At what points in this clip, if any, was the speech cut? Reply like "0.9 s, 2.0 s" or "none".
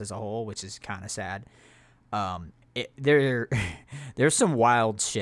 2.6 s